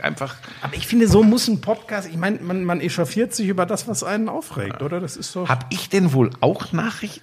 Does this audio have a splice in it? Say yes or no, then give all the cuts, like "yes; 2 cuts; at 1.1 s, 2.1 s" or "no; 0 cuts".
no; 0 cuts